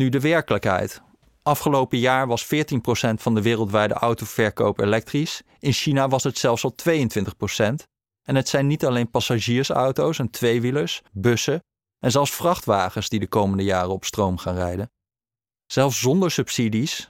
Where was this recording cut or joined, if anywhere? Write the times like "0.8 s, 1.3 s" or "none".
11.1 s